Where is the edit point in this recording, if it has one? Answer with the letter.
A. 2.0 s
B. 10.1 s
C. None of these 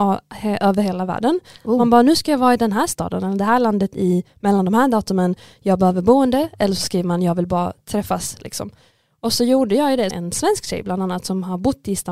B